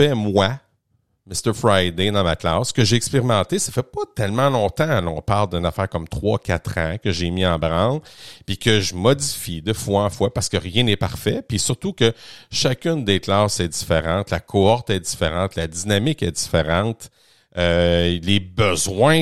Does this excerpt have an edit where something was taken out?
no; 0 cuts

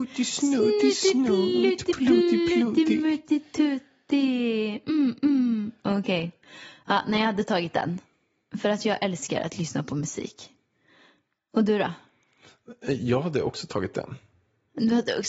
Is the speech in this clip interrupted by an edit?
yes; 1 cut; at 4.8 s

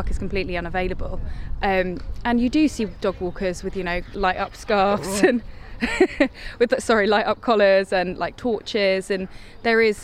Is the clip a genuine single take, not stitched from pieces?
yes; 0 cuts

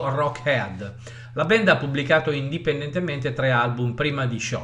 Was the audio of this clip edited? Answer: no; 0 cuts

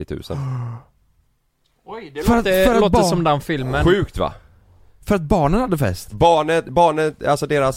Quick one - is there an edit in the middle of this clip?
no; 0 cuts

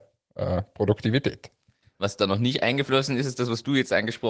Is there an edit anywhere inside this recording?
yes; 1 cut; at 1.8 s

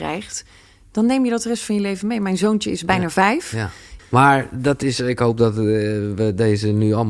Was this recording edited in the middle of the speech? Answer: yes; 1 cut; at 4.0 s

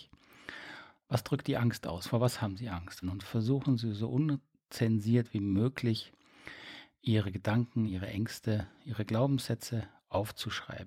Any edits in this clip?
yes; 3 cuts; at 1.0 s, 3.0 s, 7.9 s

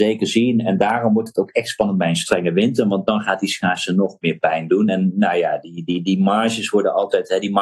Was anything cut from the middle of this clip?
no; 0 cuts

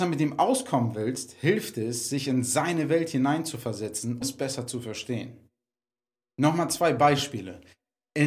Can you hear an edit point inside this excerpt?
yes; 1 cut; at 4.2 s

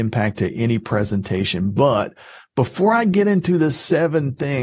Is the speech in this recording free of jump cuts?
yes; 0 cuts

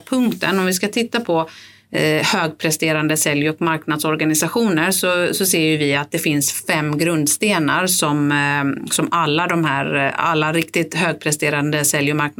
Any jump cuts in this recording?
no; 0 cuts

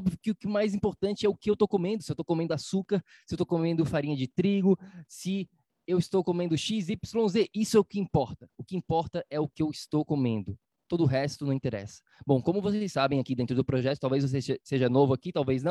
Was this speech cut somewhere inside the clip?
no; 0 cuts

